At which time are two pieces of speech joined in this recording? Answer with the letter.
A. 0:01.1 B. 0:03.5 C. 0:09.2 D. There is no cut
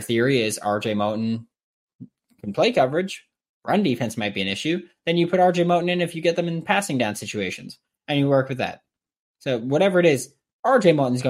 D